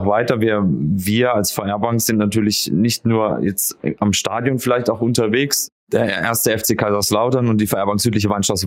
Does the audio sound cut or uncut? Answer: cut